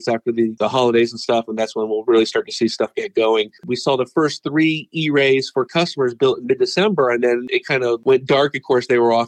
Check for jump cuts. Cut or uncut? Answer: cut